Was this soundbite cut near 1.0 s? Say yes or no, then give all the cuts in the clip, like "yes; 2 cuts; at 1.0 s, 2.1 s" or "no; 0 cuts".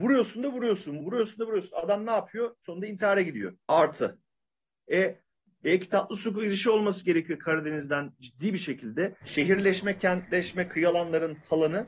yes; 3 cuts; at 1.0 s, 3.6 s, 9.2 s